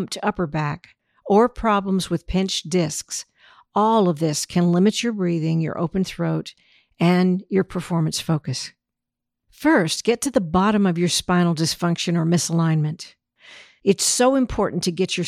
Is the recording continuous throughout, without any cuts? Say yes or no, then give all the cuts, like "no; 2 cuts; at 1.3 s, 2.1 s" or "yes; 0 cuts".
no; 1 cut; at 9.3 s